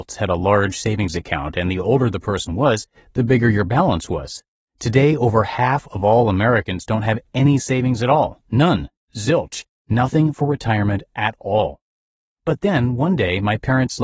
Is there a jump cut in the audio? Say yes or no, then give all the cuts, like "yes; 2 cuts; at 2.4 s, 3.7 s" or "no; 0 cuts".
yes; 1 cut; at 4.7 s